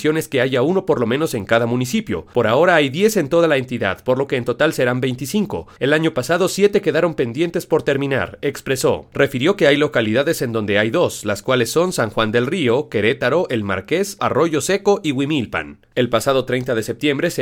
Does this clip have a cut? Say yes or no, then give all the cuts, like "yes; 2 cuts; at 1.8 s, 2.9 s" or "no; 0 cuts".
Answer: yes; 2 cuts; at 14.2 s, 15.9 s